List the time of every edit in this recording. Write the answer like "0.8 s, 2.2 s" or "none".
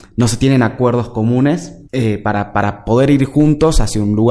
1.9 s

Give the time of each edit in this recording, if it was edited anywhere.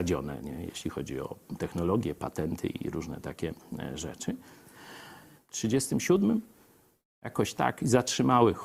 5.4 s

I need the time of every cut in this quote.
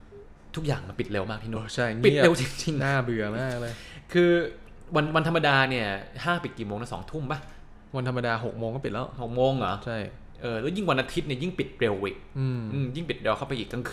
1.6 s

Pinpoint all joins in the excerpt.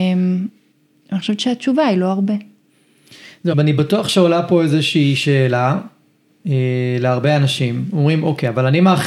3.5 s

